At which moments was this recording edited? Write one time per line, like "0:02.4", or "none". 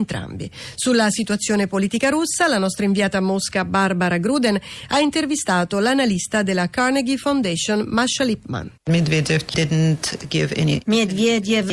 0:08.8